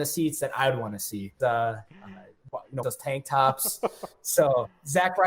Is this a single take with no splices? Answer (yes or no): no